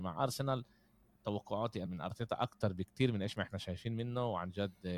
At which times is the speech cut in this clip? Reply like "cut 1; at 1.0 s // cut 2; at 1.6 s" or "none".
cut 1; at 1.8 s